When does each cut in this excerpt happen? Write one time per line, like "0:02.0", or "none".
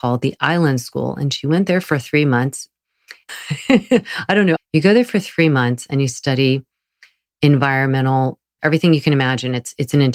0:03.3
0:04.6
0:08.6